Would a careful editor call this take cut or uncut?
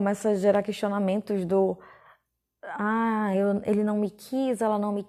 uncut